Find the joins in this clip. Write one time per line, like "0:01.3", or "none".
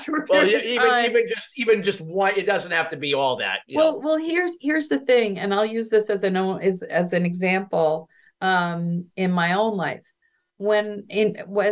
none